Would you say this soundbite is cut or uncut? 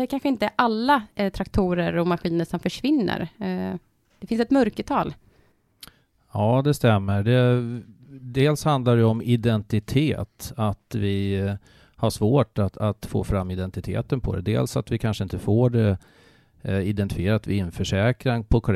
uncut